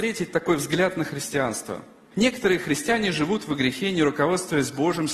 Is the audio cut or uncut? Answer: cut